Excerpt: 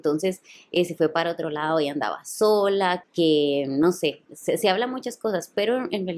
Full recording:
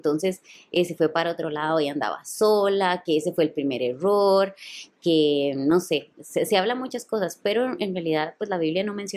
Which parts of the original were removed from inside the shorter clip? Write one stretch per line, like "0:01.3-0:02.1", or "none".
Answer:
0:03.0-0:04.9